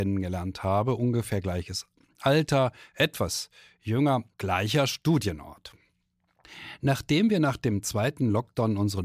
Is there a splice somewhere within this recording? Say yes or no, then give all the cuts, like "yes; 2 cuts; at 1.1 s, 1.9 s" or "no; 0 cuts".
yes; 1 cut; at 4.3 s